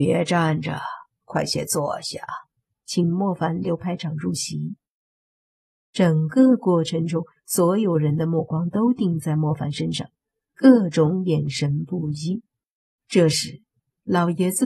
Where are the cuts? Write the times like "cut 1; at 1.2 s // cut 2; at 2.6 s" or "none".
cut 1; at 2.8 s // cut 2; at 13.0 s